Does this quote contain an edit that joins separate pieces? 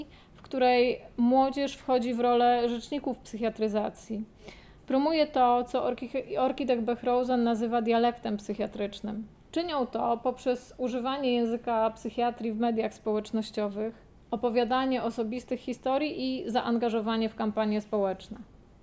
yes; 1 cut; at 9.5 s

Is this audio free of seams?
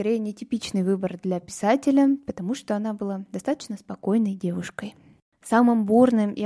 yes; 0 cuts

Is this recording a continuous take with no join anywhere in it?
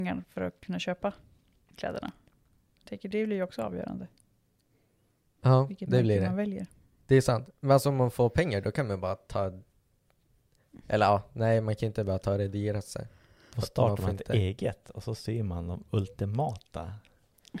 yes; 0 cuts

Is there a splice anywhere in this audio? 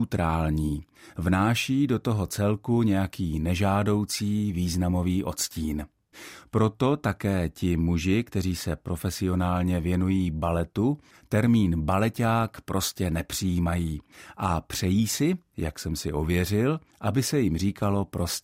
no; 0 cuts

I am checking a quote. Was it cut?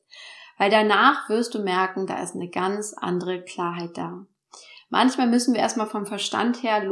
no; 0 cuts

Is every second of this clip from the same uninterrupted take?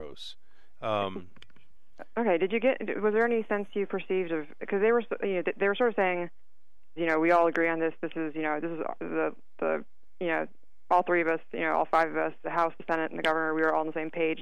no; 2 cuts; at 7.0 s, 12.4 s

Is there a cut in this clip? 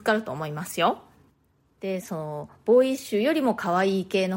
yes; 1 cut; at 2.0 s

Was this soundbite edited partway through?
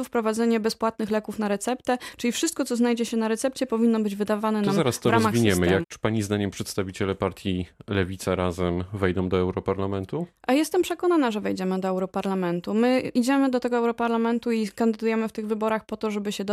yes; 1 cut; at 5.8 s

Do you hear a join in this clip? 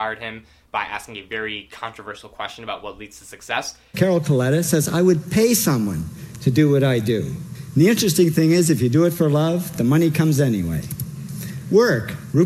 yes; 1 cut; at 3.9 s

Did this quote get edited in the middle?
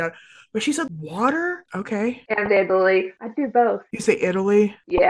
yes; 1 cut; at 1.7 s

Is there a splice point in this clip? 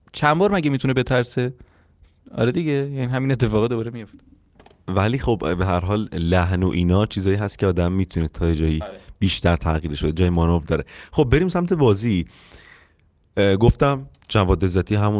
no; 0 cuts

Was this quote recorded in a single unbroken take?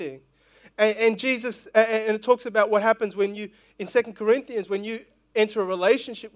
yes; 0 cuts

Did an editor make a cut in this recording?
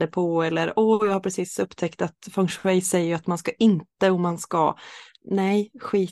no; 0 cuts

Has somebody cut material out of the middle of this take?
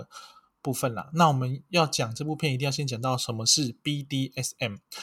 no; 0 cuts

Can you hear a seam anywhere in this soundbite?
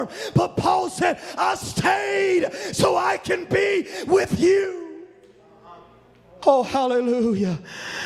no; 0 cuts

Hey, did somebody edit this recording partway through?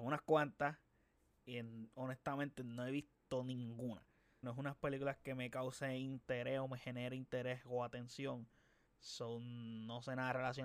yes; 2 cuts; at 1.4 s, 4.4 s

